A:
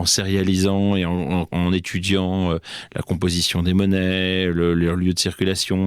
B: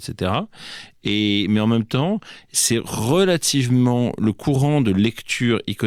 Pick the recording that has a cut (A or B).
A